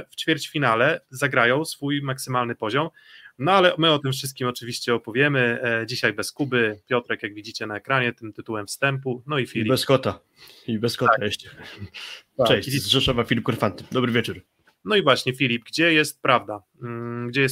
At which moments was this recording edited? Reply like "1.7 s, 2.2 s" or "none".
14.7 s